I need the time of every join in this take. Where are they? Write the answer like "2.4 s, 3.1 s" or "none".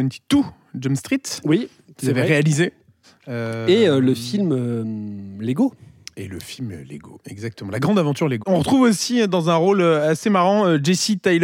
8.4 s